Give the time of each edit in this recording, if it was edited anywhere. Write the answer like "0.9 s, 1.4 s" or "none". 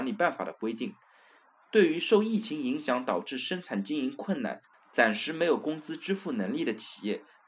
none